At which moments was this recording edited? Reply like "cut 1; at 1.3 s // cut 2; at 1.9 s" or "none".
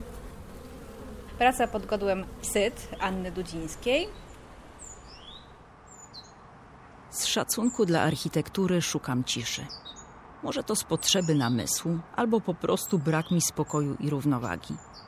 cut 1; at 12.1 s